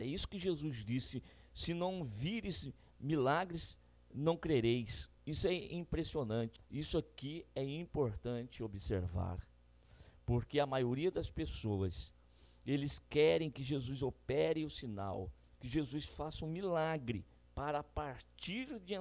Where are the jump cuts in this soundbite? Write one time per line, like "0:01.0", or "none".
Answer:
0:06.6